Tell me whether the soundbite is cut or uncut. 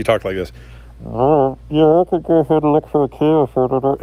uncut